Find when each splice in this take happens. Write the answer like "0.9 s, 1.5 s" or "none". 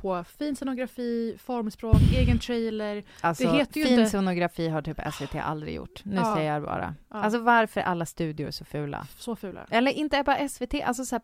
none